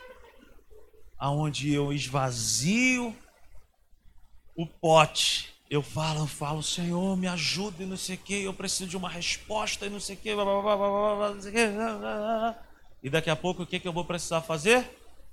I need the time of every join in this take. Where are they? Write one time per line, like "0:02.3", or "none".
0:01.1